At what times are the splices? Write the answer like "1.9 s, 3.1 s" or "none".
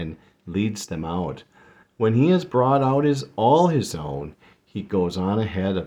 none